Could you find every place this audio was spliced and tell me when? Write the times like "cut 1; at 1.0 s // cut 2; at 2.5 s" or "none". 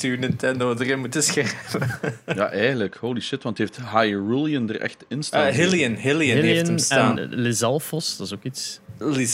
none